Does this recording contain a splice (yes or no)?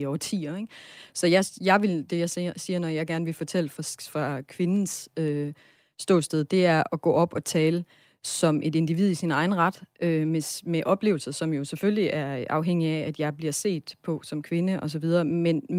no